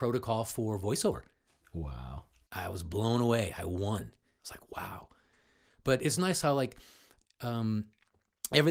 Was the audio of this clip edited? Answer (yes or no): yes